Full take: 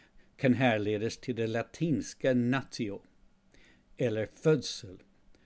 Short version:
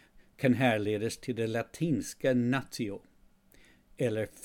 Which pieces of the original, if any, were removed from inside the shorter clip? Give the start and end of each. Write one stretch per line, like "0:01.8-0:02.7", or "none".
none